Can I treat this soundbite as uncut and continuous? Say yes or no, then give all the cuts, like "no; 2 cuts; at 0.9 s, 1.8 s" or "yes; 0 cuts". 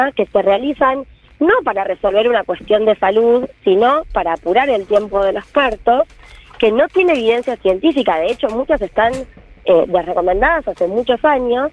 yes; 0 cuts